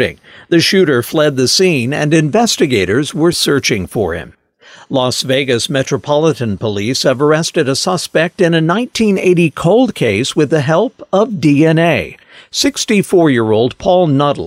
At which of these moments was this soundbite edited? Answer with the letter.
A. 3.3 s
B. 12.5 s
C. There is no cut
A